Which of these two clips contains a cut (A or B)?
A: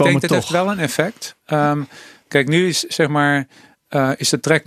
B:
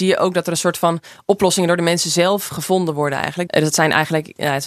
B